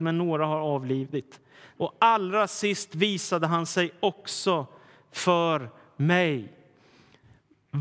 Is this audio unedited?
no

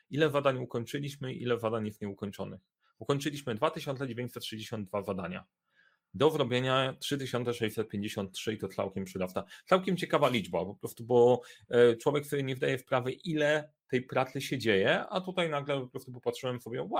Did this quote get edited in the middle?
no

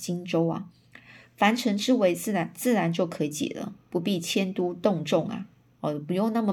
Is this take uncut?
yes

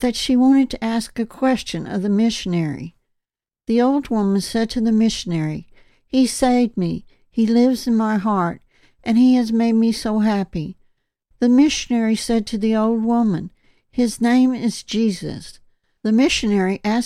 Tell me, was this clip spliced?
yes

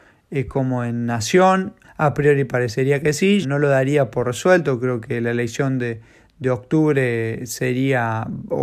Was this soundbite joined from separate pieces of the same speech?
yes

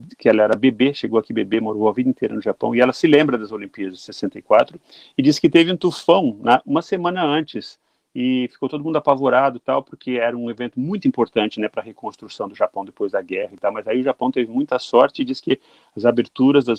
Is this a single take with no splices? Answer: yes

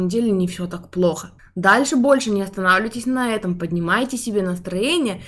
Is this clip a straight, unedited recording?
no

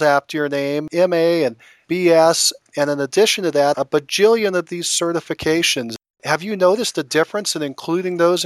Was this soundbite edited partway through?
no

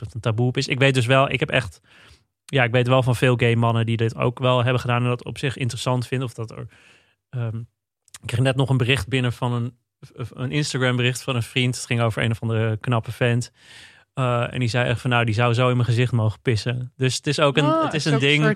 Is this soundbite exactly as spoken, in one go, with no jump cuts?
yes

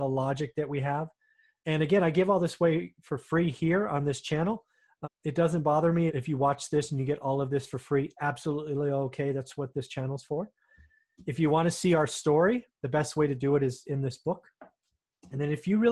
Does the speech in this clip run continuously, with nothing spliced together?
no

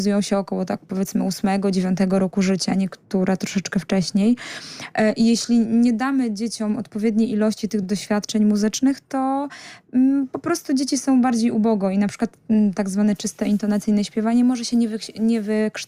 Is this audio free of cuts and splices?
yes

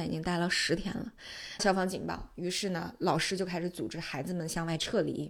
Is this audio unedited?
no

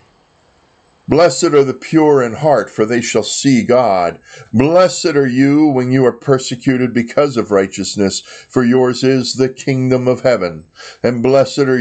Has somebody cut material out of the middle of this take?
yes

